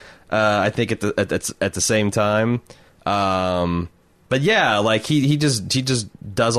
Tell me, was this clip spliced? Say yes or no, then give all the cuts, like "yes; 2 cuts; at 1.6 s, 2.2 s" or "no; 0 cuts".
no; 0 cuts